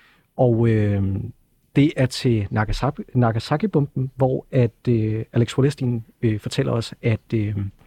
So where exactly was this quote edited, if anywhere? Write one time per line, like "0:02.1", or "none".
none